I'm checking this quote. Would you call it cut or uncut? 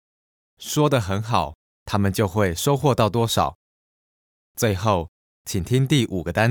cut